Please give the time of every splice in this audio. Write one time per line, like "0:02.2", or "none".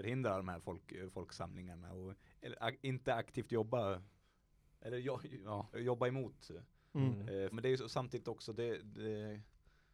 0:05.7
0:07.5